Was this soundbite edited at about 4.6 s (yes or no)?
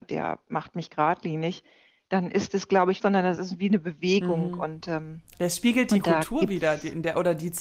no